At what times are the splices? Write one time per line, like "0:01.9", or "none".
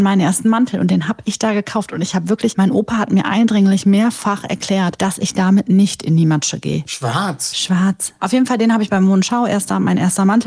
0:06.9
0:08.2